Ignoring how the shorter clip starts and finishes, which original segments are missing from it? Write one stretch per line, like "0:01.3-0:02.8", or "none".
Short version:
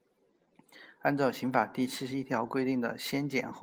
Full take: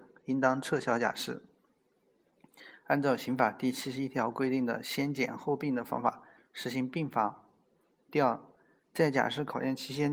none